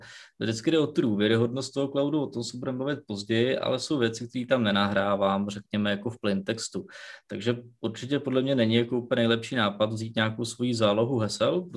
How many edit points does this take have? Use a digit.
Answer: 0